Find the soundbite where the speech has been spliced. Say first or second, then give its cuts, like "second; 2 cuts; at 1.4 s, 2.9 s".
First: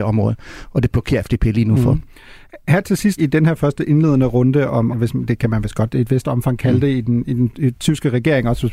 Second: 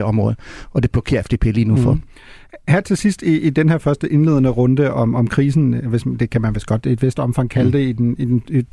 first; 2 cuts; at 3.2 s, 4.9 s